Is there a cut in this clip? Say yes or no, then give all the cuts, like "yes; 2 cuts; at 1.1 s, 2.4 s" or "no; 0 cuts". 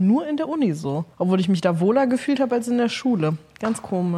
yes; 1 cut; at 1.1 s